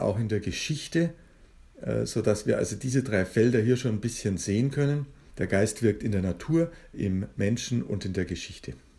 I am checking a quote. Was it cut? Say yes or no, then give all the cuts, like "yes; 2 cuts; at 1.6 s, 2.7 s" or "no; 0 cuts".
no; 0 cuts